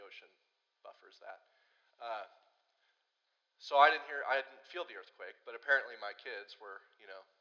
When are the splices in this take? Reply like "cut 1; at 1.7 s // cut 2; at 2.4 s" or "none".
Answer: none